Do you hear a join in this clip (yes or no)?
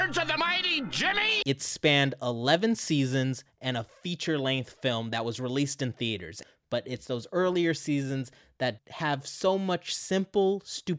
yes